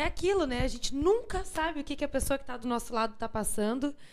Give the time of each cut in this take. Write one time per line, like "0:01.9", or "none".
none